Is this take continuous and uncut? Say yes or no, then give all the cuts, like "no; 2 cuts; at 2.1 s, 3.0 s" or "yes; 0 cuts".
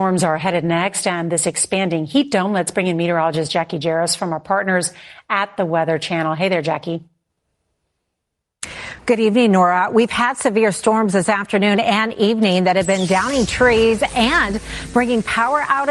yes; 0 cuts